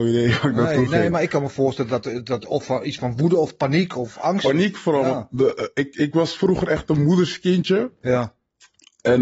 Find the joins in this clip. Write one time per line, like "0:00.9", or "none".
none